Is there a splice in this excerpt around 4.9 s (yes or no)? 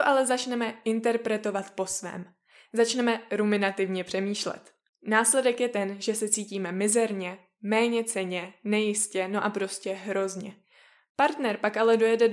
yes